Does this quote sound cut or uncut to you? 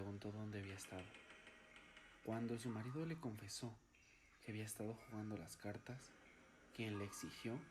cut